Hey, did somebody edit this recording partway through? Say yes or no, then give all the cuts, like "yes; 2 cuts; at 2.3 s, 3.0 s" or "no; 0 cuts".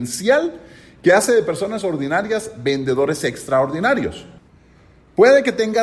no; 0 cuts